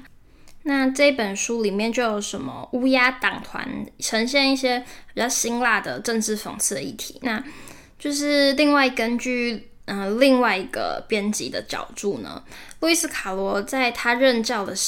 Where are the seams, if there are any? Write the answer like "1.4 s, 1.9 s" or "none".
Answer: none